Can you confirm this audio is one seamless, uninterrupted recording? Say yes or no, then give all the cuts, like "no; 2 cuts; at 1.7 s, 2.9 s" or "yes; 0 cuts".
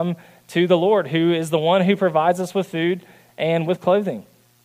yes; 0 cuts